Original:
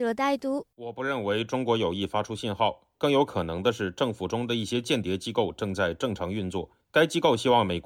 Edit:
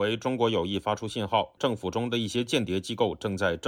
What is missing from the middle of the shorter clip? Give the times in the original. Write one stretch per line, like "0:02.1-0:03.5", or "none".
0:02.8-0:03.9